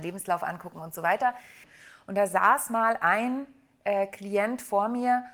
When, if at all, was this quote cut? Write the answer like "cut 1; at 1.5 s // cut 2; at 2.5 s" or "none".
cut 1; at 1.6 s